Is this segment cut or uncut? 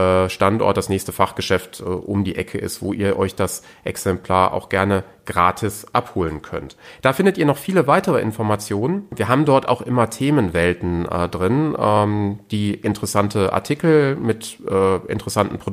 uncut